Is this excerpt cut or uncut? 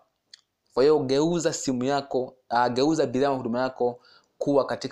uncut